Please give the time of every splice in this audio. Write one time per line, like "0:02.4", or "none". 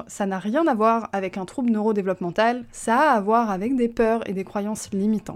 none